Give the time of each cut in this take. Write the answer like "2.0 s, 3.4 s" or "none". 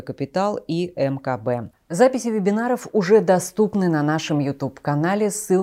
1.7 s